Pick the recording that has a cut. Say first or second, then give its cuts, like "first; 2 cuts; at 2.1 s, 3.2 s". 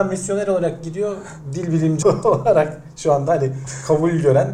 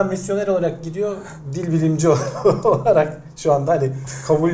first; 1 cut; at 2.0 s